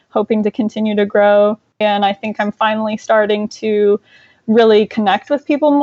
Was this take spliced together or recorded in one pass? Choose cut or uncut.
cut